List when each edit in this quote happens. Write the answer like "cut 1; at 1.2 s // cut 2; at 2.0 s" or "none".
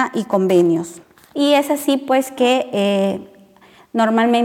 cut 1; at 1.3 s